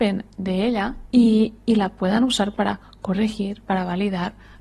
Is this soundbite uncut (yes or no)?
yes